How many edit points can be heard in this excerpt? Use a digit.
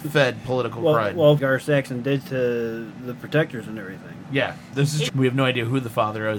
2